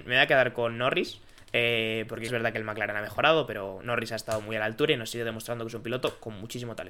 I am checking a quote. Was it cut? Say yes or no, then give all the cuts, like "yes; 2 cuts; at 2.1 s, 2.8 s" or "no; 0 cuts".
yes; 1 cut; at 2.3 s